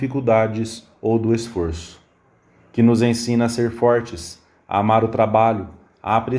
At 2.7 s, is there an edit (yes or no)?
no